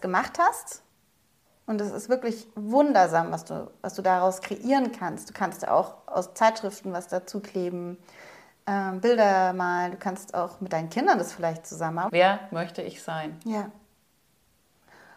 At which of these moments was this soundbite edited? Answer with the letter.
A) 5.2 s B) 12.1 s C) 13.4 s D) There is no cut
B